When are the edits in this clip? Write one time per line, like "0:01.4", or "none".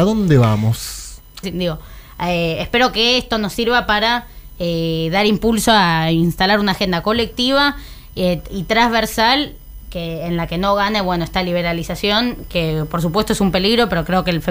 0:01.4